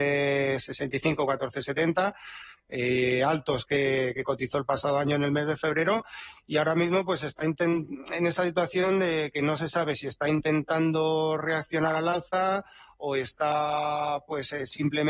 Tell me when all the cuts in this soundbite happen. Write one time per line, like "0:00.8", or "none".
none